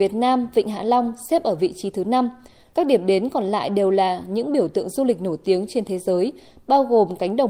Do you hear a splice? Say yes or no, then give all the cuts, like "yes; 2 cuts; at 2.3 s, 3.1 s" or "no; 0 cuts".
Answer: yes; 1 cut; at 2.7 s